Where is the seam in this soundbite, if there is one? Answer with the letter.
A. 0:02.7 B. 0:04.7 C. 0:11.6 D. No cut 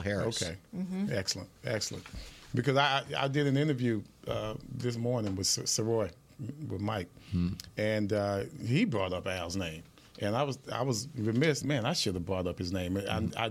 C